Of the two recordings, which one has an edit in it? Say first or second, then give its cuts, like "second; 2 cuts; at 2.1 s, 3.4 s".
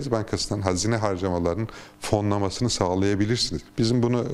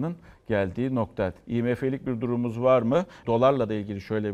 second; 2 cuts; at 1.4 s, 3.2 s